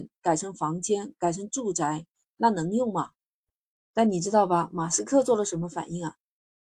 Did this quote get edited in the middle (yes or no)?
no